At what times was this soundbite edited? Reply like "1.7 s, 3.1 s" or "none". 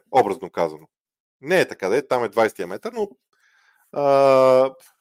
none